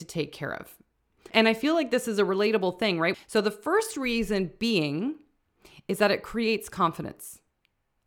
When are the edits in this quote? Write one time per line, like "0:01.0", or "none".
0:01.3
0:03.1